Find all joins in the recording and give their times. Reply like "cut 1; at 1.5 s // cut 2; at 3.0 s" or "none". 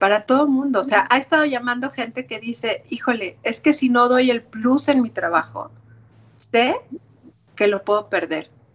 cut 1; at 1.1 s